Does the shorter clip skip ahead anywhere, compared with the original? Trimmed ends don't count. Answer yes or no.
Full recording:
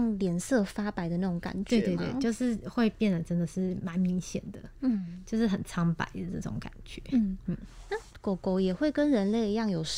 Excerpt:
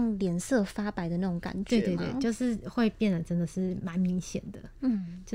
no